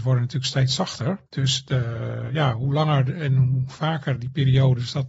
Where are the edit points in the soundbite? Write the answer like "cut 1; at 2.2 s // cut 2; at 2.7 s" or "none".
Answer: cut 1; at 1.3 s